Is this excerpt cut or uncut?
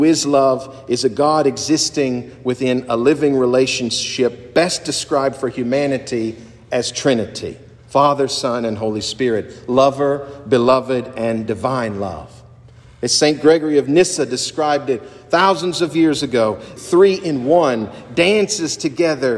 cut